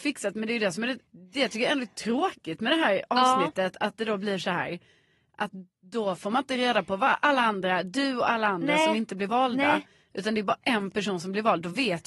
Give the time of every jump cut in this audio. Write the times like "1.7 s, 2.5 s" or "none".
1.1 s